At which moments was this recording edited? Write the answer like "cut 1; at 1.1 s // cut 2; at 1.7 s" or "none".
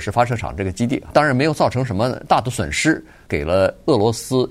cut 1; at 1.1 s // cut 2; at 3.3 s